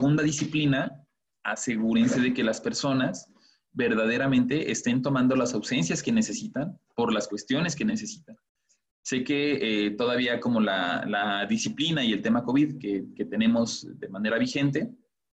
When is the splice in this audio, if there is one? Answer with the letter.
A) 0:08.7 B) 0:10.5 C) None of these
C